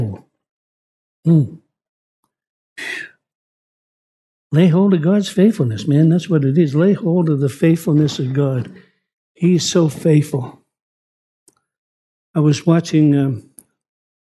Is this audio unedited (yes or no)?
yes